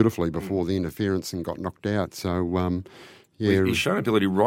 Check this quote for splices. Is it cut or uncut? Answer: uncut